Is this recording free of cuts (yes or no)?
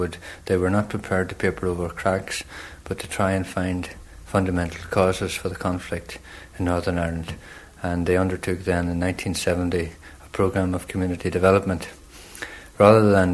yes